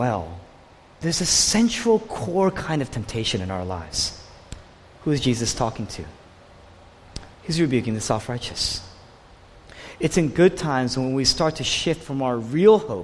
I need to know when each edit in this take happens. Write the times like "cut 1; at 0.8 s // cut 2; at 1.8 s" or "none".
cut 1; at 7.3 s